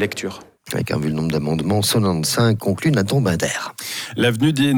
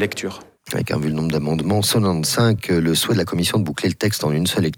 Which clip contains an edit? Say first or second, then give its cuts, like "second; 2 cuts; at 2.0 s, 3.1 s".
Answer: first; 1 cut; at 2.6 s